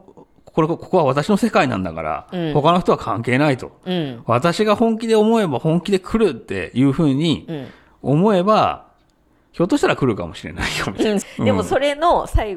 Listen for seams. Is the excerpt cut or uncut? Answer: cut